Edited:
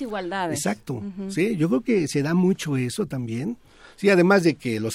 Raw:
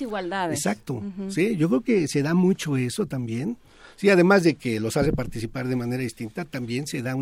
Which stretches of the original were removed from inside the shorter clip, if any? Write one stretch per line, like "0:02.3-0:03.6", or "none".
none